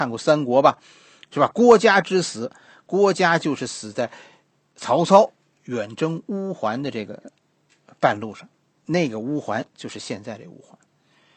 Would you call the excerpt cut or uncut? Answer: cut